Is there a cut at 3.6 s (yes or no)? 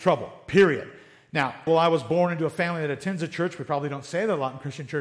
no